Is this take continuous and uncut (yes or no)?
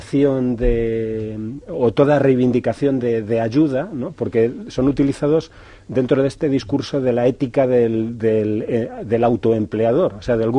yes